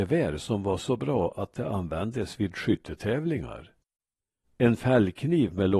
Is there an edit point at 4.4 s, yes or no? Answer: yes